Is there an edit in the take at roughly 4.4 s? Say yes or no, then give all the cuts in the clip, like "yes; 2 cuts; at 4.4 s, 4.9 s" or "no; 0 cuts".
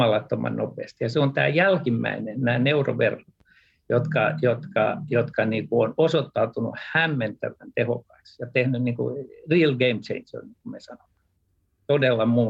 no; 0 cuts